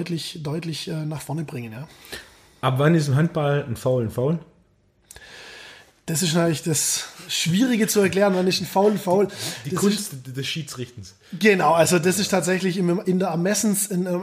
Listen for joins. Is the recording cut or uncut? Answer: uncut